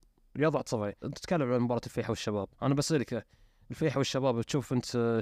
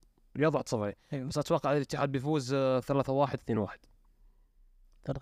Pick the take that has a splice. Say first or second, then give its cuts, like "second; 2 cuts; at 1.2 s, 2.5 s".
first; 2 cuts; at 1.0 s, 2.5 s